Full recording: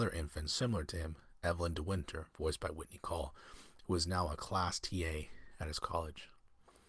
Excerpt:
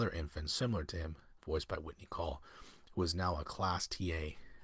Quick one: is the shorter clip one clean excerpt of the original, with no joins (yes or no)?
no